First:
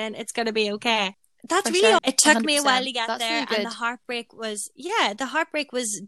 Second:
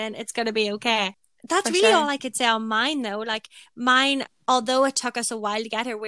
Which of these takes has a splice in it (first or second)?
first